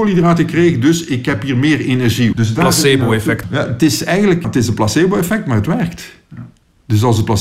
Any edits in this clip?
yes; 3 cuts; at 2.3 s, 3.4 s, 4.4 s

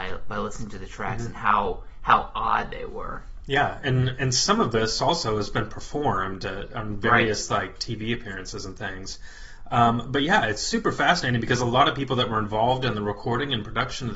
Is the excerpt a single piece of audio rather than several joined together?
yes; 0 cuts

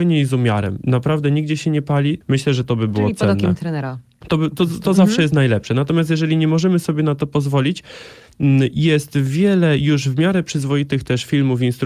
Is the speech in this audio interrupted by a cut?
yes; 1 cut; at 2.2 s

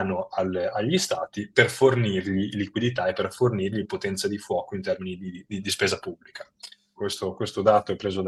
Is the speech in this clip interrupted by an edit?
yes; 1 cut; at 7.0 s

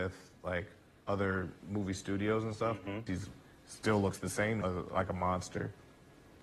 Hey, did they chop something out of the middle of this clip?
yes; 2 cuts; at 3.1 s, 4.6 s

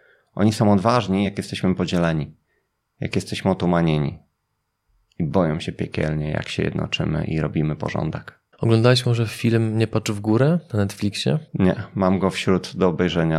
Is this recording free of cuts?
yes; 0 cuts

